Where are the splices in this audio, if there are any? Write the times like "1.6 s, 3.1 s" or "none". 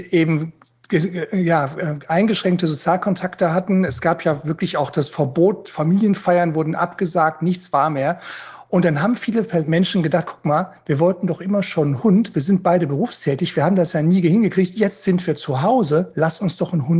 none